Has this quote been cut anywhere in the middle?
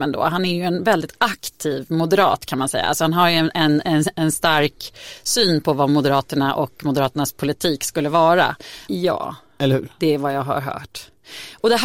yes; 1 cut; at 8.9 s

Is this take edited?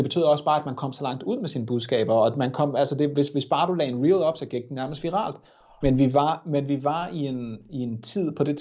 yes; 1 cut; at 5.8 s

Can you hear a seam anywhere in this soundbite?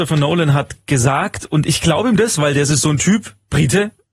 no; 0 cuts

